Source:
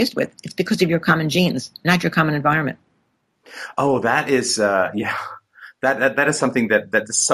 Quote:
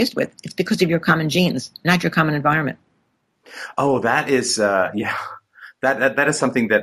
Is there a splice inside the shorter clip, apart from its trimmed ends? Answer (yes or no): no